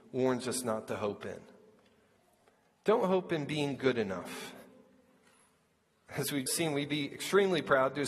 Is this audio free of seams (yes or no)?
no